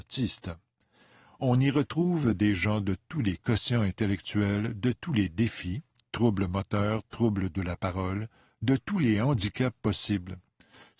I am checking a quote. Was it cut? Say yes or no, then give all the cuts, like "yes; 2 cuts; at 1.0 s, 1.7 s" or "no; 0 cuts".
no; 0 cuts